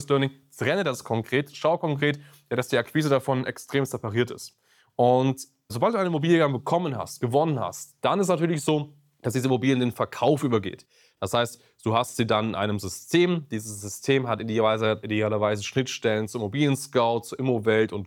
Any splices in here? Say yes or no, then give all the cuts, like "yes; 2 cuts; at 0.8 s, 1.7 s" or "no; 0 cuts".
no; 0 cuts